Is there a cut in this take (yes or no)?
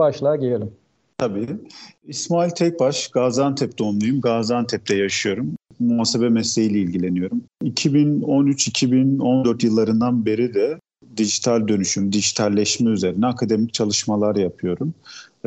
yes